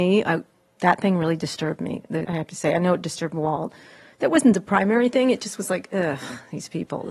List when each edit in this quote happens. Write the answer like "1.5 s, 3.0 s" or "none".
2.2 s

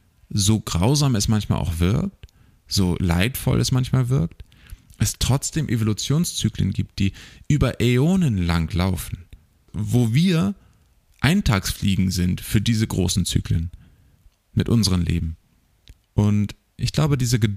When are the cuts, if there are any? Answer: 16.0 s

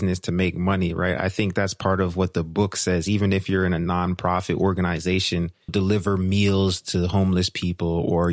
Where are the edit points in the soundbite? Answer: 5.7 s

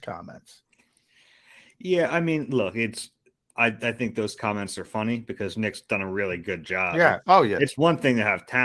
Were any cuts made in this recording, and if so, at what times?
none

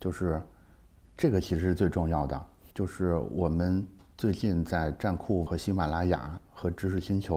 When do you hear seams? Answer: 2.7 s, 5.5 s

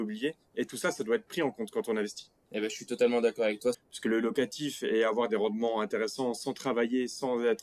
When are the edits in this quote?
3.7 s

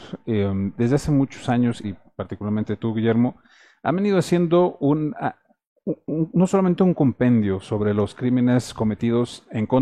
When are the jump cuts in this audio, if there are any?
1.8 s

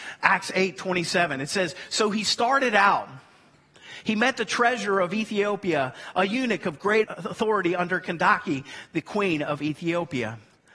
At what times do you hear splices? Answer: 7.0 s

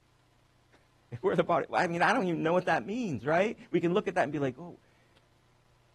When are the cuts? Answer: none

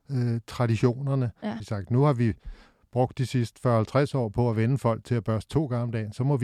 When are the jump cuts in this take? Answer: 1.6 s

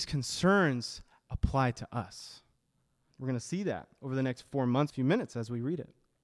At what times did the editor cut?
3.1 s, 4.9 s

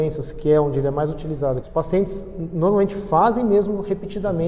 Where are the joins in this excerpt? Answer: 1.6 s

